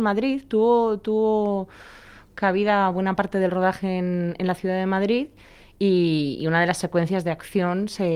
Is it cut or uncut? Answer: uncut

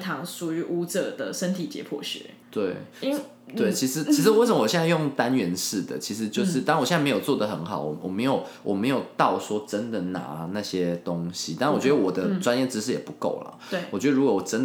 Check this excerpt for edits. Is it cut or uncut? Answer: cut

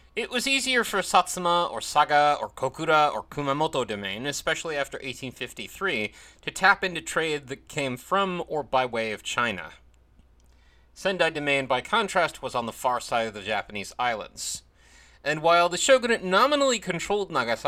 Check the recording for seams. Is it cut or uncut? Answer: uncut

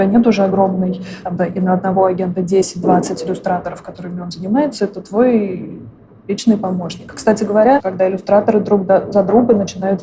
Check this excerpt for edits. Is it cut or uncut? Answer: cut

